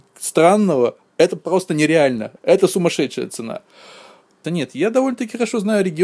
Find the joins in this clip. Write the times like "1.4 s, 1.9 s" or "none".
2.4 s, 4.4 s